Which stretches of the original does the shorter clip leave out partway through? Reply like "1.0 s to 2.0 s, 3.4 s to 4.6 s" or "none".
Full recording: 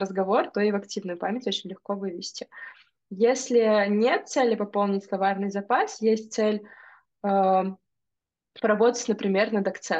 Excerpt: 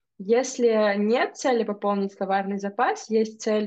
none